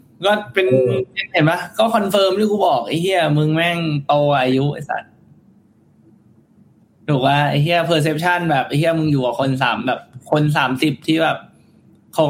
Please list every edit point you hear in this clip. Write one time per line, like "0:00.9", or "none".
none